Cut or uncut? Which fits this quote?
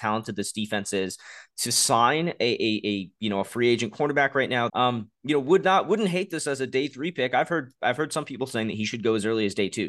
cut